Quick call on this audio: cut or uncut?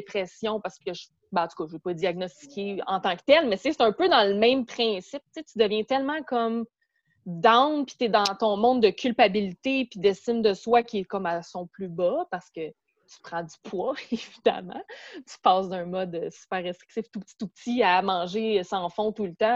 uncut